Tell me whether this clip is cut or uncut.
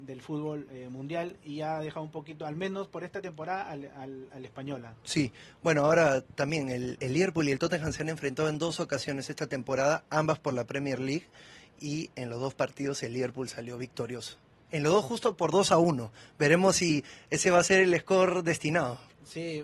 uncut